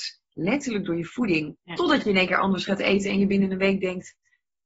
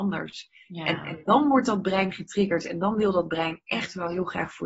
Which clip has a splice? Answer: first; 1 cut; at 1.6 s

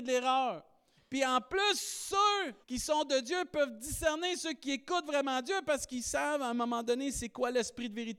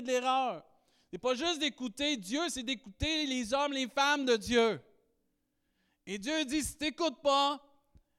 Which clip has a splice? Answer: first; 2 cuts; at 1.0 s, 2.6 s

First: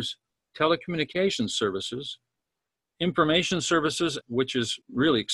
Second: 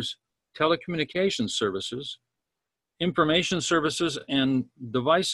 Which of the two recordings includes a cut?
first; 1 cut; at 4.2 s

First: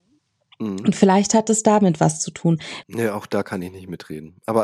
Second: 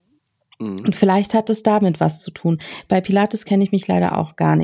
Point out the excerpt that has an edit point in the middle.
first; 1 cut; at 2.8 s

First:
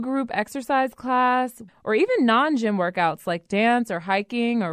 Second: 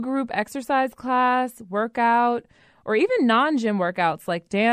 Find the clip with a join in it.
first; 1 cut; at 1.7 s

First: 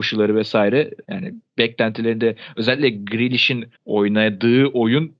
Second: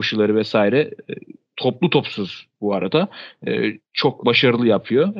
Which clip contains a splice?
first; 2 cuts; at 1.0 s, 3.7 s

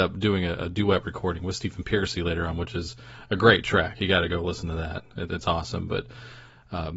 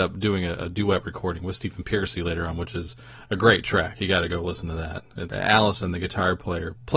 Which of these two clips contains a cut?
second; 1 cut; at 5.3 s

